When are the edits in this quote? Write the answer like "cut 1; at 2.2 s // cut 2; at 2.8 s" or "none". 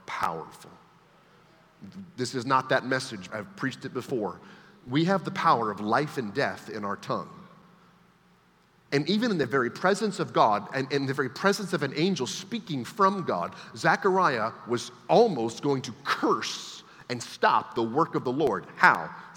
cut 1; at 3.3 s

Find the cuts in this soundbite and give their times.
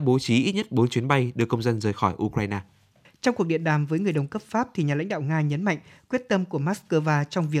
cut 1; at 3.0 s

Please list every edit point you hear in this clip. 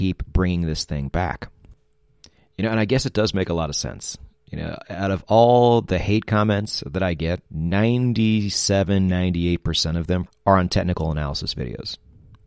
cut 1; at 7.5 s // cut 2; at 10.3 s

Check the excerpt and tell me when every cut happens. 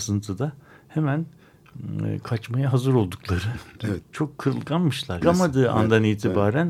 cut 1; at 4.0 s // cut 2; at 5.2 s

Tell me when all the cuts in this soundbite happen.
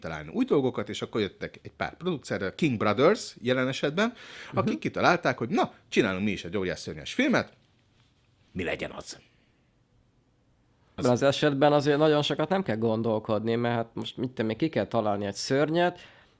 cut 1; at 11.0 s

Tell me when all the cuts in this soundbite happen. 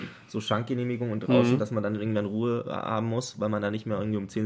none

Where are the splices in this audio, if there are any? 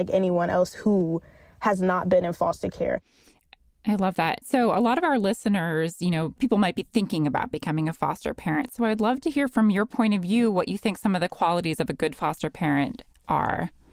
none

